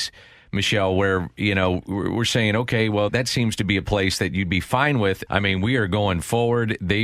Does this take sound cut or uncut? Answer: cut